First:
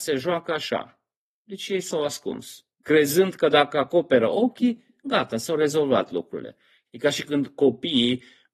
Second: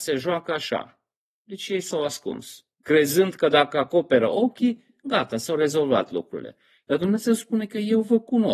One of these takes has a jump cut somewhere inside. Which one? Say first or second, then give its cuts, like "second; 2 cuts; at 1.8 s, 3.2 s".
first; 1 cut; at 6.9 s